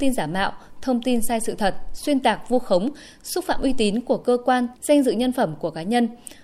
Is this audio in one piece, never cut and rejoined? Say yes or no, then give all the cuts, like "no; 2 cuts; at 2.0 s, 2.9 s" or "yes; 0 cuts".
no; 1 cut; at 4.7 s